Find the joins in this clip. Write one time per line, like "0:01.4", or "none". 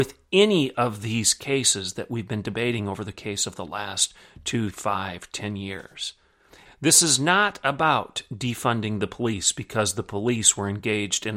0:04.7
0:06.7